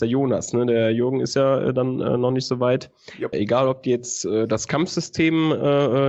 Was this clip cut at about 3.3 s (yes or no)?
yes